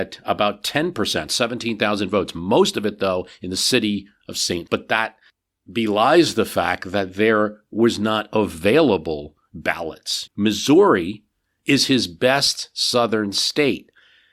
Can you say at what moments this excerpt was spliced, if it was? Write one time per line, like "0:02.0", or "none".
0:04.7
0:10.3